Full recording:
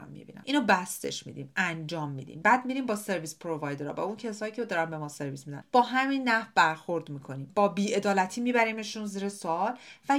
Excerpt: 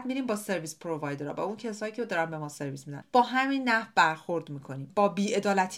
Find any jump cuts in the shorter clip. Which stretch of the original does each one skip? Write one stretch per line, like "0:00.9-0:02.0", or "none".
none